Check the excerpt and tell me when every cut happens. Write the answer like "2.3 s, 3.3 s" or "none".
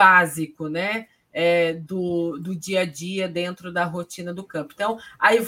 none